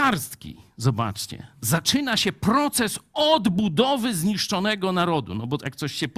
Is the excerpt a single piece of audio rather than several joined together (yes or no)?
yes